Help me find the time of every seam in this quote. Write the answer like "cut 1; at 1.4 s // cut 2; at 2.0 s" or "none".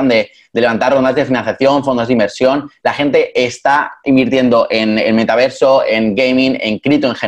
none